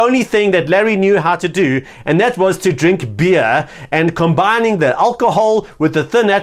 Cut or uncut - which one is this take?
uncut